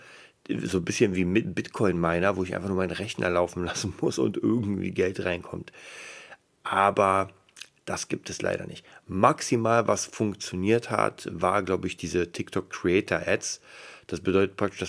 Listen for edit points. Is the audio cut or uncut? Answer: uncut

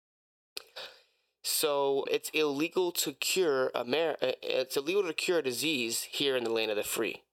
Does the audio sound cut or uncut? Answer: cut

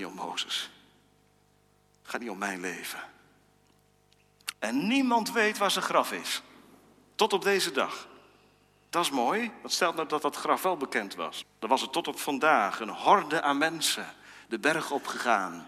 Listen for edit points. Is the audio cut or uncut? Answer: cut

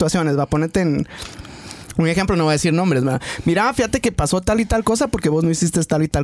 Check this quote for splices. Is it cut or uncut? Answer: uncut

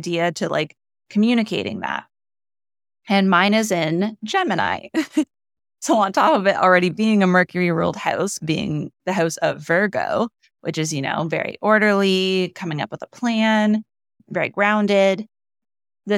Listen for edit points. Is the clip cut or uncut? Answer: uncut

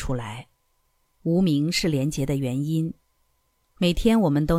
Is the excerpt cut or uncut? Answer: uncut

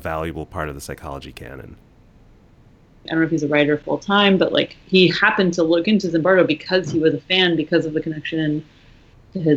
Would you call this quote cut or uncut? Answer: cut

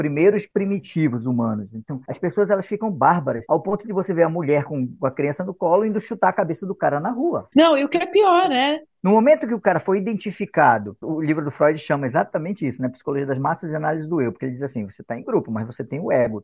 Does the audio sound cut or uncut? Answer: cut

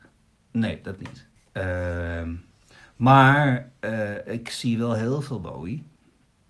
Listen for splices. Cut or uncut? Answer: cut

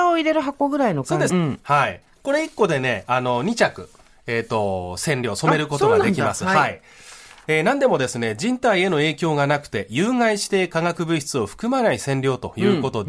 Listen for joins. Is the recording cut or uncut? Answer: cut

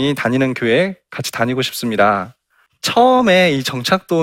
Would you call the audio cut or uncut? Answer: cut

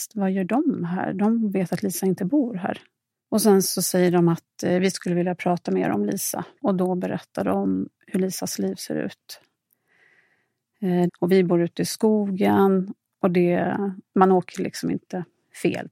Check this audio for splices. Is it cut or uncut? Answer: cut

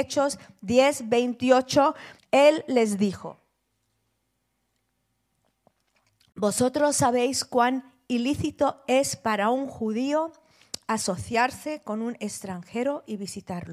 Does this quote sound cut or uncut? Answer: cut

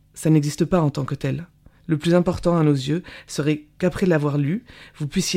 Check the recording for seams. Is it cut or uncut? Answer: cut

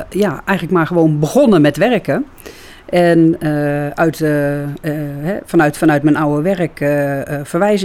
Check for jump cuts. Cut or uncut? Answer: uncut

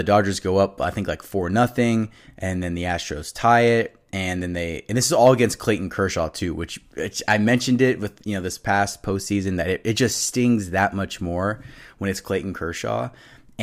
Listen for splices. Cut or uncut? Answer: uncut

